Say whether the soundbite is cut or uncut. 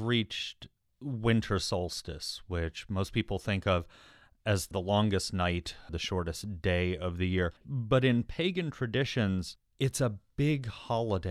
cut